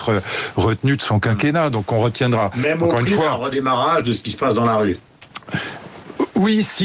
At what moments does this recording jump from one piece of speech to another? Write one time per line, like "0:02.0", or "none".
none

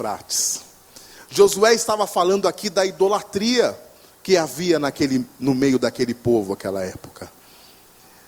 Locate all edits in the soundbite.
none

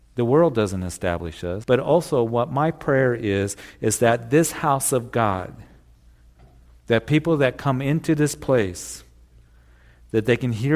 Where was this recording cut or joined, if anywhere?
0:01.6

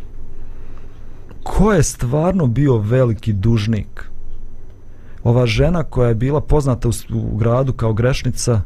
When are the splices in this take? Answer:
0:01.4
0:05.2

